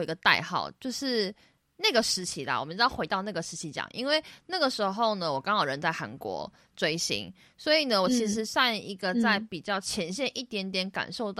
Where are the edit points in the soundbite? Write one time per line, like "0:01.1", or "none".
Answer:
none